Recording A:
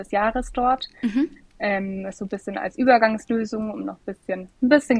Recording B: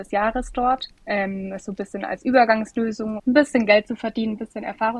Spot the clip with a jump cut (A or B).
B